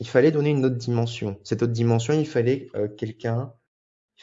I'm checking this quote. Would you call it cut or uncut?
uncut